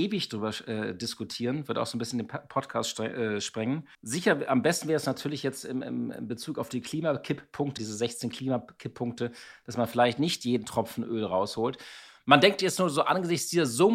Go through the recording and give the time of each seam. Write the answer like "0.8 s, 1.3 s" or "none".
3.9 s, 7.8 s

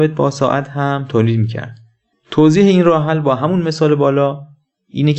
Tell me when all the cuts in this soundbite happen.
2.1 s

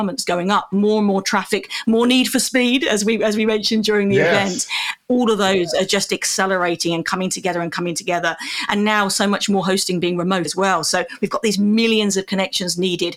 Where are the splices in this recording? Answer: 10.5 s

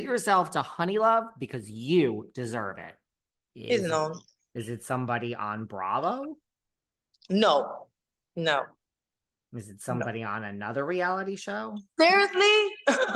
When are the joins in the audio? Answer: none

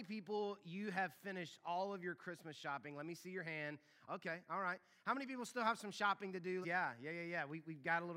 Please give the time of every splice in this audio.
4.1 s, 6.6 s

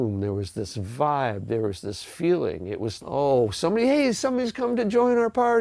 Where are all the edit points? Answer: 3.0 s

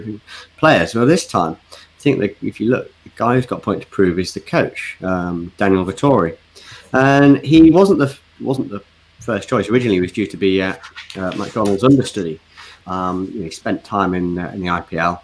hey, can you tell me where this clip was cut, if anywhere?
12.8 s

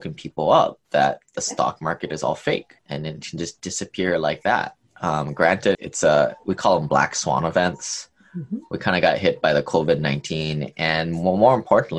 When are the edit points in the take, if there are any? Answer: 2.8 s, 5.7 s

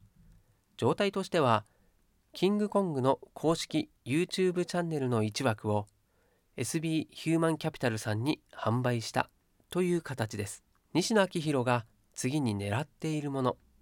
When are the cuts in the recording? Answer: 10.9 s

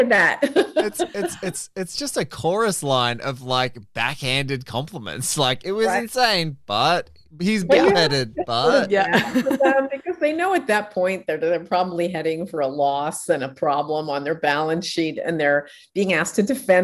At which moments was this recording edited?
none

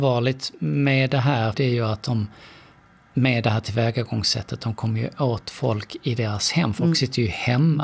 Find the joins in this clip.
1.5 s

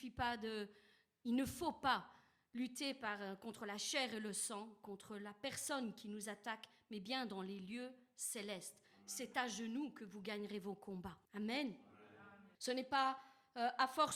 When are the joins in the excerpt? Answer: 11.3 s, 12.5 s

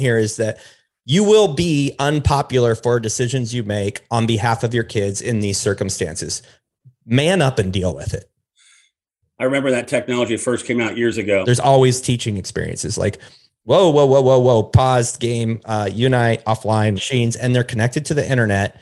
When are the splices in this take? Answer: 11.4 s, 17.0 s

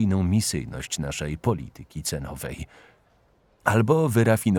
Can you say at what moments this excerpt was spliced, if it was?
none

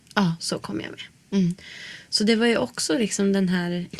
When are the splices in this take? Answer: none

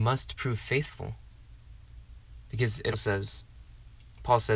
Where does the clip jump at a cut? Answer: 2.9 s

